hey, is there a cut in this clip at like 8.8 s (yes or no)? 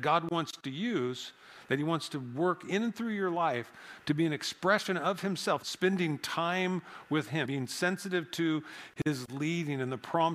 no